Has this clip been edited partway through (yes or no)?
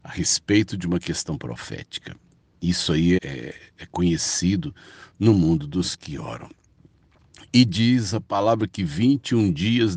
yes